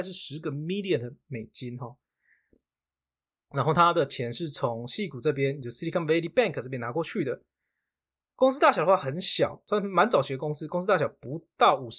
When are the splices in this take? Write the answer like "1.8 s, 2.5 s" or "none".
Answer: none